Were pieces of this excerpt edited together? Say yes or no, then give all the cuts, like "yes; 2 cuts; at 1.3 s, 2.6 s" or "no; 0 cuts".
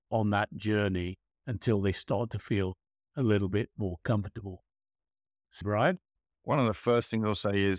yes; 1 cut; at 5.6 s